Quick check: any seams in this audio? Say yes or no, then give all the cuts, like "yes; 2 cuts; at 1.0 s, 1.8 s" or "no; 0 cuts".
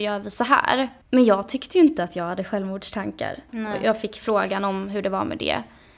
yes; 2 cuts; at 1.0 s, 3.5 s